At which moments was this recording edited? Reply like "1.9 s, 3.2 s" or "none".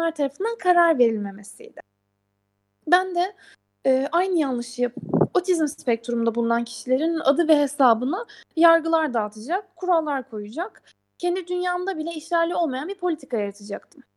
none